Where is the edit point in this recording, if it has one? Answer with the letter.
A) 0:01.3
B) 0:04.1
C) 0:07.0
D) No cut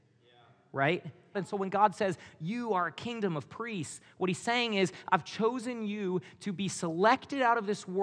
A